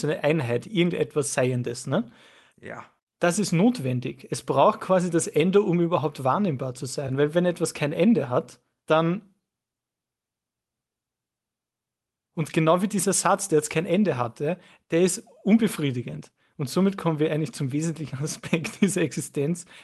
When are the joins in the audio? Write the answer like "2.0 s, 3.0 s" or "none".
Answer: none